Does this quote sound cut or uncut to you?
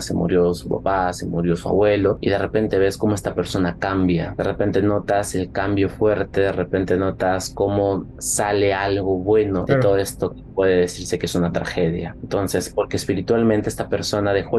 uncut